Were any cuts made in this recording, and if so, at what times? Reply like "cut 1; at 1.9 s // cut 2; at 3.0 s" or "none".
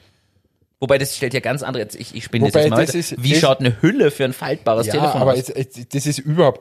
none